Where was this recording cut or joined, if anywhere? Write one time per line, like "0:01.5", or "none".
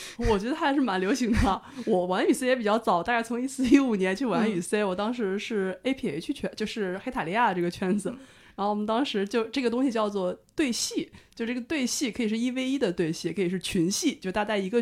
none